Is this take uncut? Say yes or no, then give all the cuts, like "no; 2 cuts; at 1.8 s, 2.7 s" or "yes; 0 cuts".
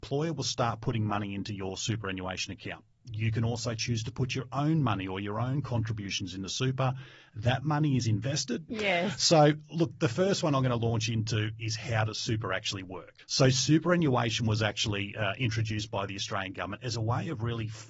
no; 1 cut; at 8.7 s